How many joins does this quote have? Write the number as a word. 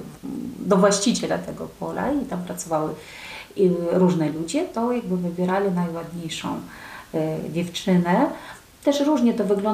zero